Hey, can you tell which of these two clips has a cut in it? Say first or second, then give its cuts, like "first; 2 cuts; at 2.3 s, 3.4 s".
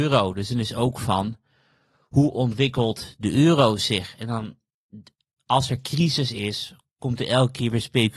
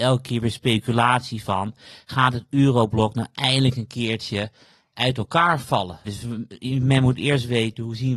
second; 1 cut; at 6.0 s